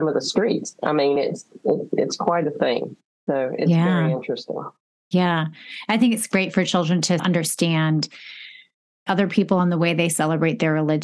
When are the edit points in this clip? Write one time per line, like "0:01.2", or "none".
none